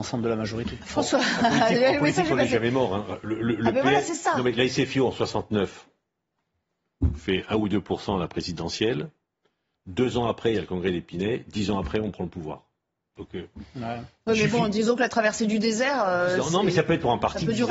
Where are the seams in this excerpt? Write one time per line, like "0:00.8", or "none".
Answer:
none